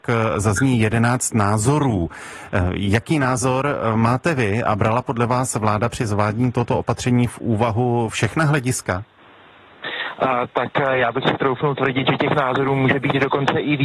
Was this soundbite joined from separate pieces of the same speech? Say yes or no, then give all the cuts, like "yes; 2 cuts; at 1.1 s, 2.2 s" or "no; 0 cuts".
no; 0 cuts